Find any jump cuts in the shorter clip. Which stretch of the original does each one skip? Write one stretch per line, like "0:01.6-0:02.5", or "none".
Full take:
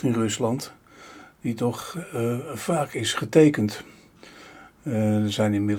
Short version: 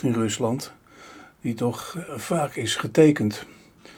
0:02.1-0:02.5

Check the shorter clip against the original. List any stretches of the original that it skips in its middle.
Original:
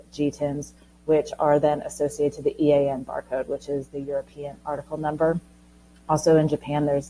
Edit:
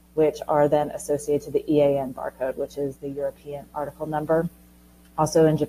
none

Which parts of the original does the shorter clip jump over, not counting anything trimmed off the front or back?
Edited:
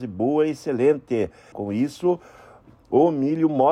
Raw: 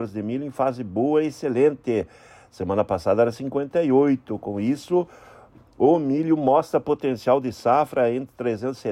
0:02.3-0:04.4

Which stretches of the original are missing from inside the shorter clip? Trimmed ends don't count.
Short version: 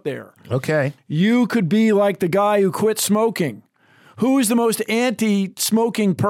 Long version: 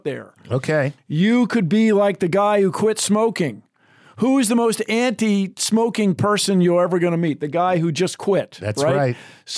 none

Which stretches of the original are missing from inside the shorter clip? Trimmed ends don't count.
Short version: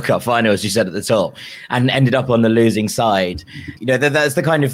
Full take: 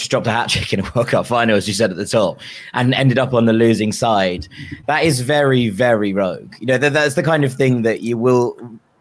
0:04.8-0:06.6

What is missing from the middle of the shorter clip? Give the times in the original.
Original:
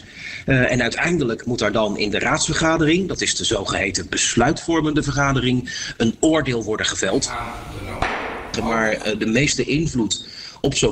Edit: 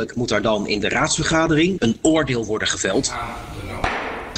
0:03.1-0:06.0

